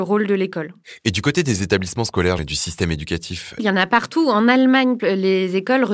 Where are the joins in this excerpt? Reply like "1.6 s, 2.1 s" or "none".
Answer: 2.4 s, 3.6 s, 5.0 s